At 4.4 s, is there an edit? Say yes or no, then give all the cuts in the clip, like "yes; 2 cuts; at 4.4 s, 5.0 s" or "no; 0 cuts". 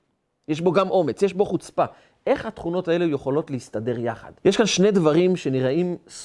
yes; 1 cut; at 4.4 s